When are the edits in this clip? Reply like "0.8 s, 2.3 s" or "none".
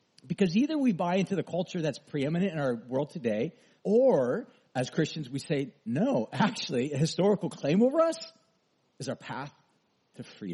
3.8 s